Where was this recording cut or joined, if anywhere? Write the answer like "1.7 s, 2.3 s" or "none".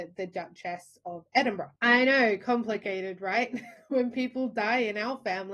1.8 s